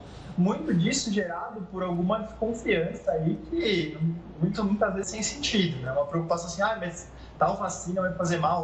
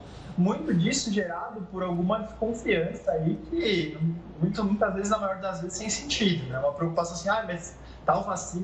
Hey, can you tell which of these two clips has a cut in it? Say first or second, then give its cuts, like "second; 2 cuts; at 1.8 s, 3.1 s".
first; 1 cut; at 5.0 s